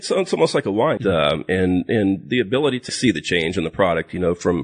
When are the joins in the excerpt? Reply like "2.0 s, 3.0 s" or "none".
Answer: 1.0 s, 2.9 s